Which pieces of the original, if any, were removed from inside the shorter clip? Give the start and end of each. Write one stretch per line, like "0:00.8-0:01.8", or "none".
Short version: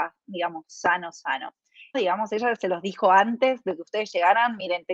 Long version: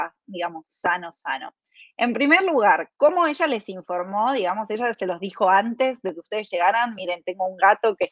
0:01.9-0:04.3